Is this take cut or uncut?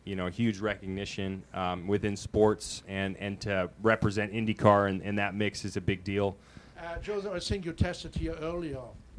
cut